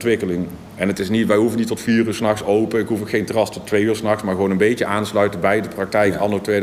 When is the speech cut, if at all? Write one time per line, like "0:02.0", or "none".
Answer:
none